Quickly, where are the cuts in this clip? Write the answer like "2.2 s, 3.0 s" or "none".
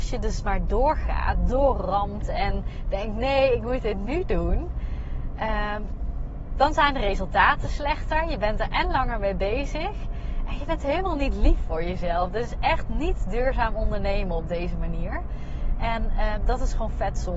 none